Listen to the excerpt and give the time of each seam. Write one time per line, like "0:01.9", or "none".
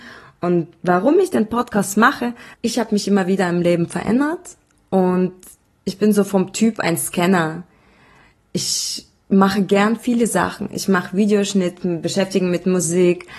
0:02.5